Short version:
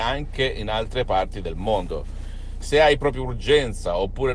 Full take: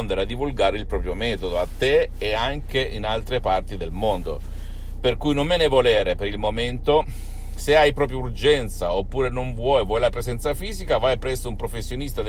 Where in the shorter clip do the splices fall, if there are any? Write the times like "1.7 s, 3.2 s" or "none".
2.6 s